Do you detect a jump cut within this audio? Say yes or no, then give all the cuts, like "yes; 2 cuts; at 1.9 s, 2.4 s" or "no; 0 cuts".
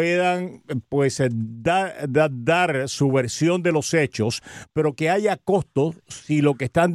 no; 0 cuts